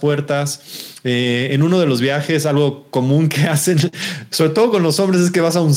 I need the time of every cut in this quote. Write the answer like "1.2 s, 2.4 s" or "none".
none